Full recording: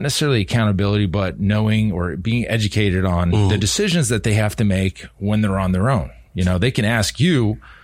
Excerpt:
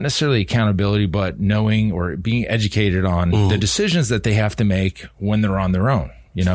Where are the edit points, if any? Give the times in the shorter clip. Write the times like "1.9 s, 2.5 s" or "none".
none

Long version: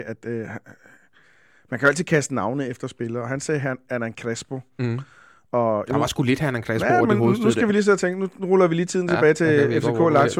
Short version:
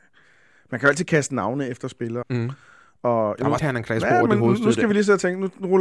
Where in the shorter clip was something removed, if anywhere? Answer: 2.2 s, 3.6 s

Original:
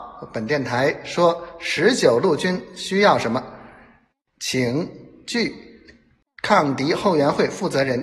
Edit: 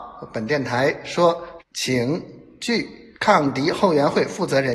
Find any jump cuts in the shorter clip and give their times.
1.6 s, 3.1 s

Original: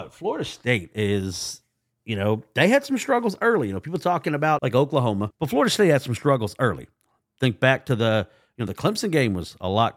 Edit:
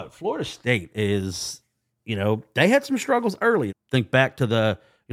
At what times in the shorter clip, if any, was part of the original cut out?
3.7 s

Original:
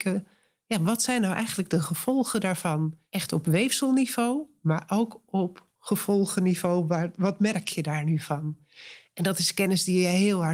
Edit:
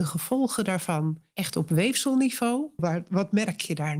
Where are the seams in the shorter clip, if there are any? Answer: 2.8 s

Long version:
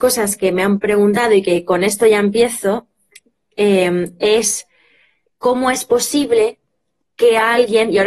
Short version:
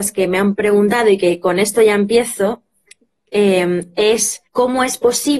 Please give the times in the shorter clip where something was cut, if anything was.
4.5 s

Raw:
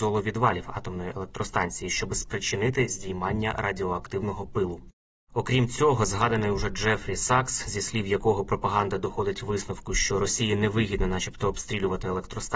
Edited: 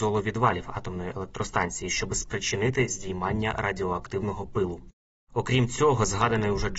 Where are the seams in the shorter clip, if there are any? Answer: none

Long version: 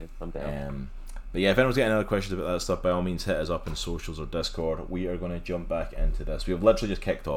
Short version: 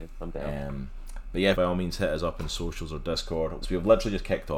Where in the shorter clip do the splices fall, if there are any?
1.5 s, 3.6 s

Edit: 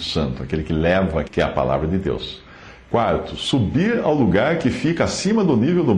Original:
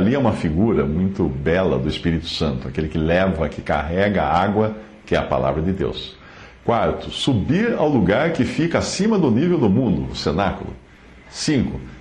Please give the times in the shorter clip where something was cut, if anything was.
1.3 s

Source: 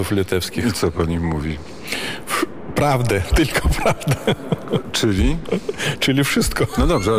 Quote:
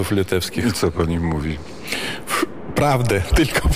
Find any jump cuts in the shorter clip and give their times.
none

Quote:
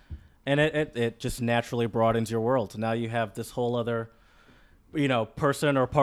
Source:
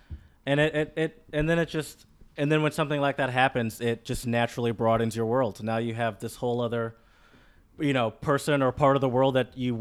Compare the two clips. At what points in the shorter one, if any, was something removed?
0.9 s

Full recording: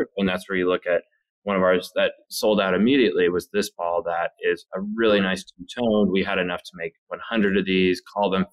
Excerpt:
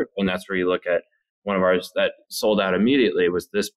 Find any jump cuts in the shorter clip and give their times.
none

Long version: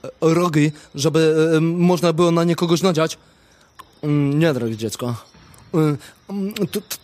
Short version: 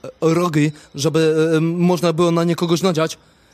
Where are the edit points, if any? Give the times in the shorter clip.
none

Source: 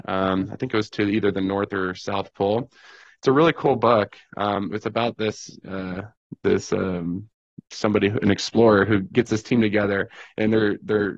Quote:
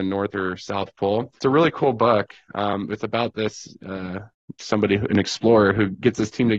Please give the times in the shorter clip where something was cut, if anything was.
1.4 s, 4.6 s

